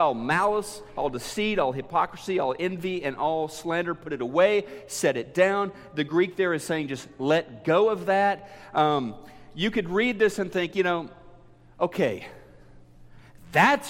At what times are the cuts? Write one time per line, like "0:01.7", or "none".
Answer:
none